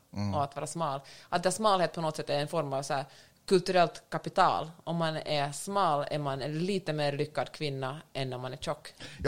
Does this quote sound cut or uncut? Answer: uncut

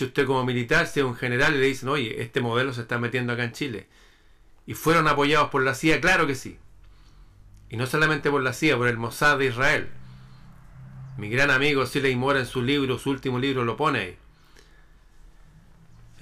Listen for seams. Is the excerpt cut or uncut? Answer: uncut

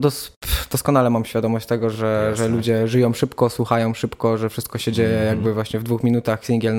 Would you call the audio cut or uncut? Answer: uncut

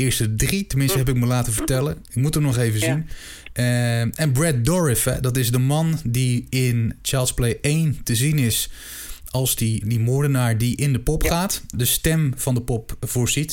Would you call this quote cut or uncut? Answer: cut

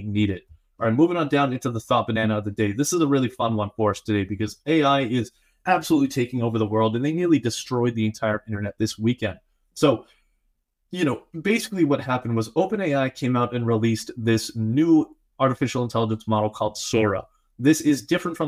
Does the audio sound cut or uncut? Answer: uncut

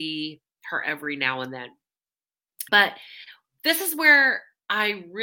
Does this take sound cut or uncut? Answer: cut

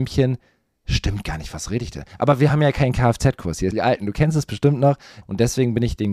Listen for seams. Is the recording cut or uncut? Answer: cut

